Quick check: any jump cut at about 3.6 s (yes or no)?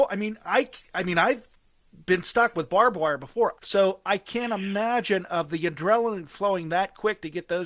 yes